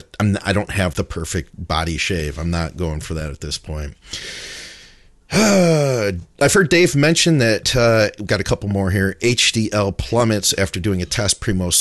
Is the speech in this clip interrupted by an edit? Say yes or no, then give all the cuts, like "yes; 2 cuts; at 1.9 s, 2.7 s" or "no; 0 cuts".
yes; 1 cut; at 0.9 s